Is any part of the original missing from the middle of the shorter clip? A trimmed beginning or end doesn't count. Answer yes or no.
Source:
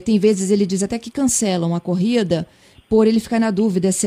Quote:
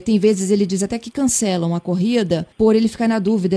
yes